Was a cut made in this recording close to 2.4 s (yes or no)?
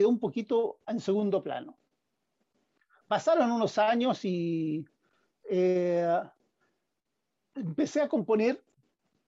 no